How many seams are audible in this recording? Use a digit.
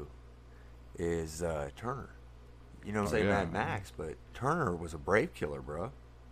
2